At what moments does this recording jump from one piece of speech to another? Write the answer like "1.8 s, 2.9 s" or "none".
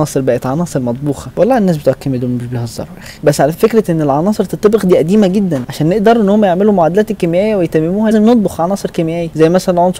3.5 s, 8.1 s